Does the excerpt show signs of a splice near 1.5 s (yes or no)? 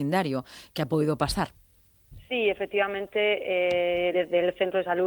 no